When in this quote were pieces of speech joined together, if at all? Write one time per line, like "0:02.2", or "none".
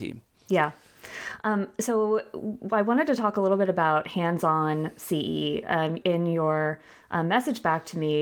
0:06.0

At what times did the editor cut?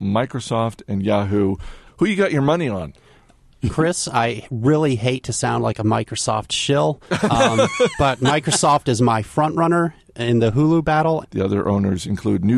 0:01.9
0:11.2

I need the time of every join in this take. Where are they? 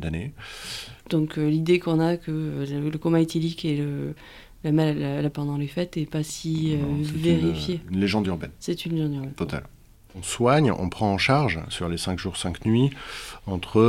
0:01.0
0:05.3

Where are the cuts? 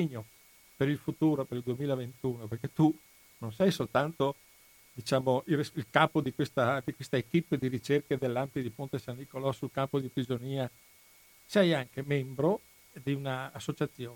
none

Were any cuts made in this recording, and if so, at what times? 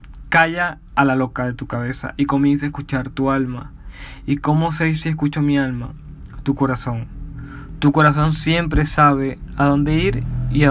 none

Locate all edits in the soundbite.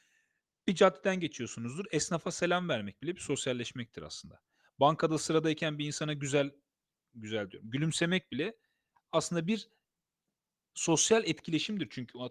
none

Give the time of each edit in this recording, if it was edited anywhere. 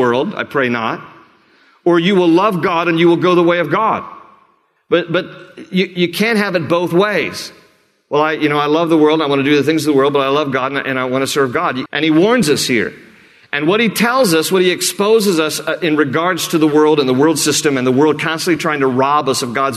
0:11.9

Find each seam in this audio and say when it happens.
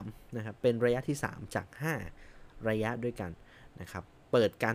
none

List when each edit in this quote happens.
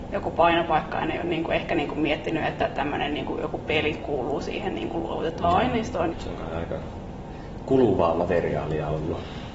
0:06.1

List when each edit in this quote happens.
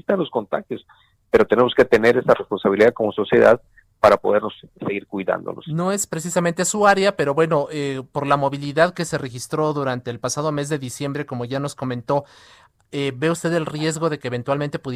none

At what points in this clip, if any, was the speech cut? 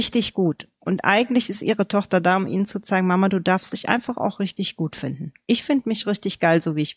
none

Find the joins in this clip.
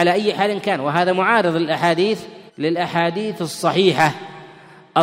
0:02.5

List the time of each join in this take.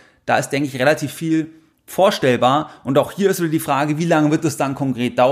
none

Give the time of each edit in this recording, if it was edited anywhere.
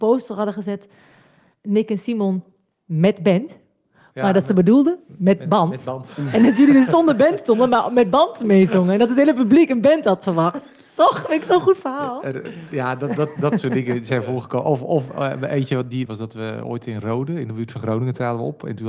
0:16.1

